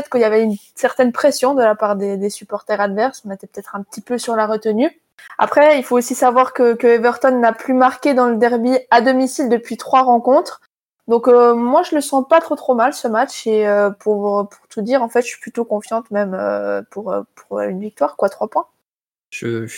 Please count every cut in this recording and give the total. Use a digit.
0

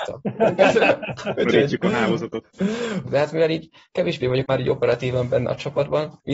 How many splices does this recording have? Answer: 2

